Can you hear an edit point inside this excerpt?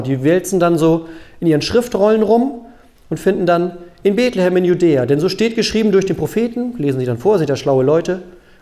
no; 0 cuts

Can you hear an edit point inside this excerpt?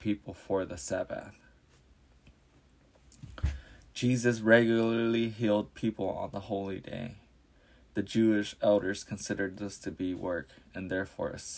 no; 0 cuts

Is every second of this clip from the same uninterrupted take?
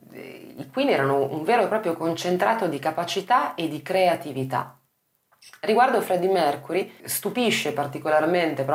no; 1 cut; at 7.0 s

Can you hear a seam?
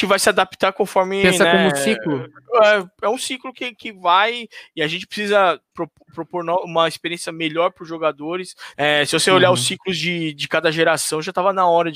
yes; 2 cuts; at 5.7 s, 8.7 s

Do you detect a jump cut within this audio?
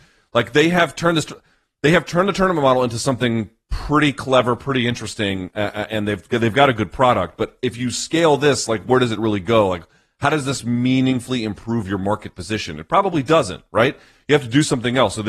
no; 0 cuts

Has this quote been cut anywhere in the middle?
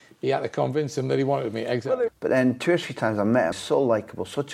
yes; 2 cuts; at 2.1 s, 3.5 s

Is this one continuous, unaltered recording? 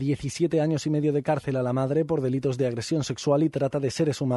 yes; 0 cuts

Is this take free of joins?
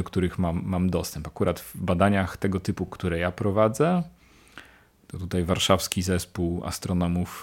yes; 0 cuts

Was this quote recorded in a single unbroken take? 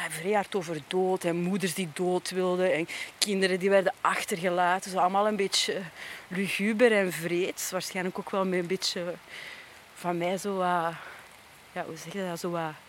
yes; 0 cuts

